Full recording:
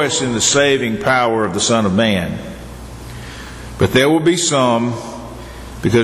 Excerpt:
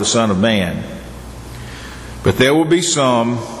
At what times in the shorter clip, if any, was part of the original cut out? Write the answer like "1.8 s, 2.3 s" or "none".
none